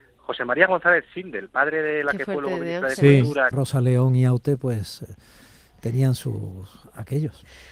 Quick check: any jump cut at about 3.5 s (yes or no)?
yes